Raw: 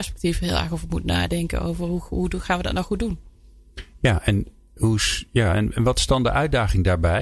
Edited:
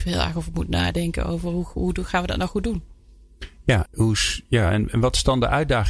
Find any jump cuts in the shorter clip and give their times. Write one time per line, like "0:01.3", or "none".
0:03.9